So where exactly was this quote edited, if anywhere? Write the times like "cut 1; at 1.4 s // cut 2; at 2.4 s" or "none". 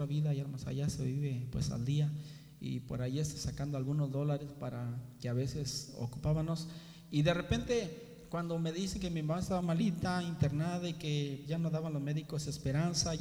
cut 1; at 9.6 s // cut 2; at 11.5 s